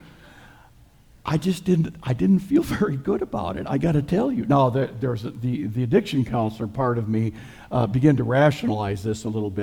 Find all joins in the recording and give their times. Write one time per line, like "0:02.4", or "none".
none